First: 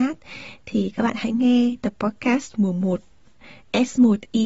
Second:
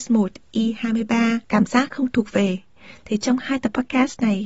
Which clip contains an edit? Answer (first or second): second